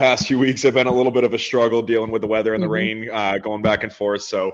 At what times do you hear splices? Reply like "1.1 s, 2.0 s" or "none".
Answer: none